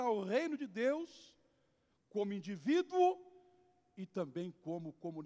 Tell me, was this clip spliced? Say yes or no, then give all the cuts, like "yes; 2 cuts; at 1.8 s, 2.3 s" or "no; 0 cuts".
yes; 1 cut; at 1.9 s